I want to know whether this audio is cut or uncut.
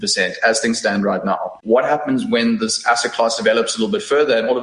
cut